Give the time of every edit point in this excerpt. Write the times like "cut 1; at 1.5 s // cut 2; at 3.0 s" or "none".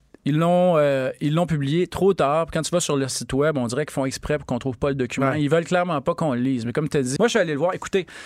cut 1; at 7.2 s